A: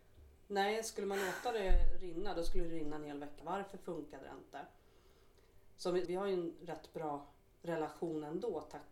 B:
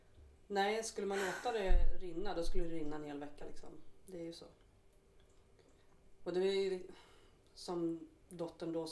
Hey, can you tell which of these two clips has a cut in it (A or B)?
A